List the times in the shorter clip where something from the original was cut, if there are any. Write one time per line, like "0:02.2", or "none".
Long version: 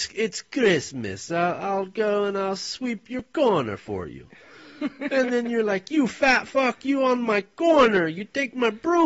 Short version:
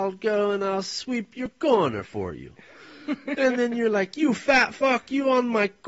none